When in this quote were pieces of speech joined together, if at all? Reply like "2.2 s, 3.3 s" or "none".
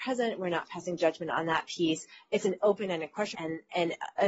3.3 s